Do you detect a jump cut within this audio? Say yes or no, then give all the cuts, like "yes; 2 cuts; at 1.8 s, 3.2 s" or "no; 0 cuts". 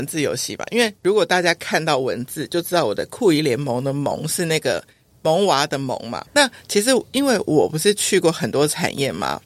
yes; 1 cut; at 6.3 s